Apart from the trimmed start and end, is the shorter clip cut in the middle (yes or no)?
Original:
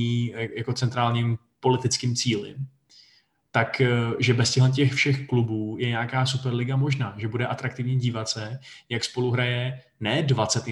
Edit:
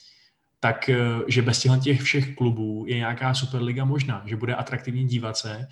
no